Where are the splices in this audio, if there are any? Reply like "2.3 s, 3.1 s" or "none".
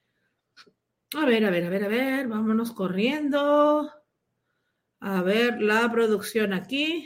none